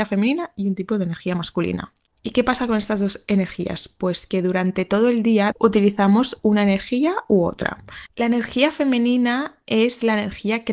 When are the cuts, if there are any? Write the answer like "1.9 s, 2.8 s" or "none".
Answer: 5.5 s, 8.1 s

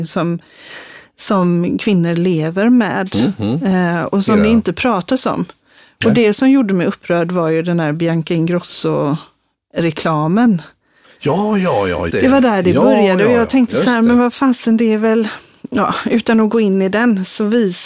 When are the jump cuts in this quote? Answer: 12.1 s

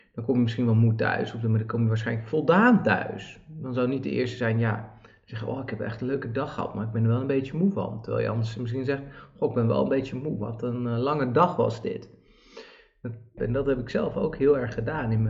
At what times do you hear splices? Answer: 13.4 s

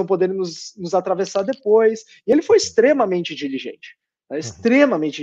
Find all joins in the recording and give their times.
none

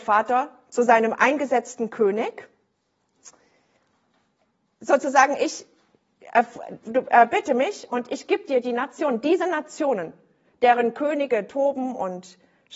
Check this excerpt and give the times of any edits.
6.8 s

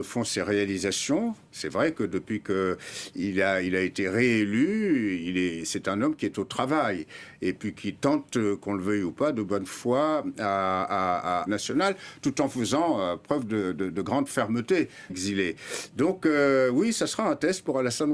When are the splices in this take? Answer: 11.5 s, 15.1 s

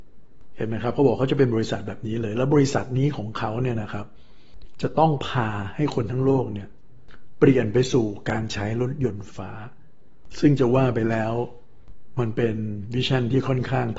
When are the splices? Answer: 9.3 s

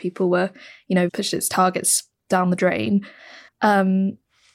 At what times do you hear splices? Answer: 1.1 s, 3.5 s

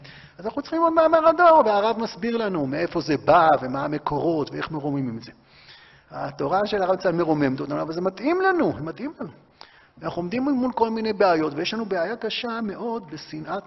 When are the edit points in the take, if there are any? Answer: none

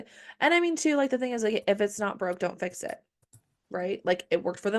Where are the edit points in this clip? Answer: none

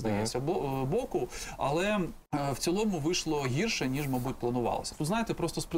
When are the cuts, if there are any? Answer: 2.3 s

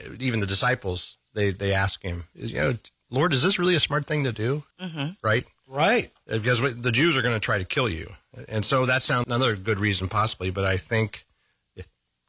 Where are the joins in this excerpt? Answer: 4.7 s, 9.2 s

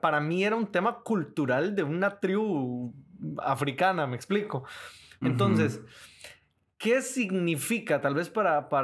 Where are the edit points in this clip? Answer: 5.2 s

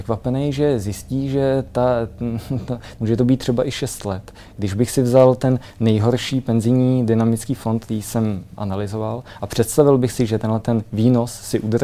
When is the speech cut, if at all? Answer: 3.0 s

